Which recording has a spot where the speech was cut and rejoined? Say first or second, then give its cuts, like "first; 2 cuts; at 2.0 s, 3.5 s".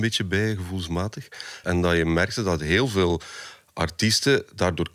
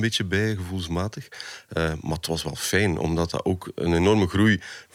first; 1 cut; at 1.6 s